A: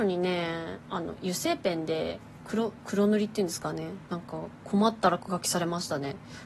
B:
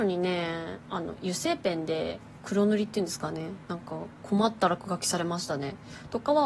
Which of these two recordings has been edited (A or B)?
B